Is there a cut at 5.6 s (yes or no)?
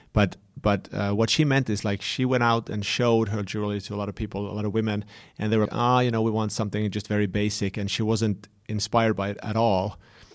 yes